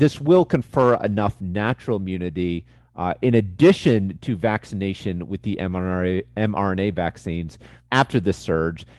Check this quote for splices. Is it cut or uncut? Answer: cut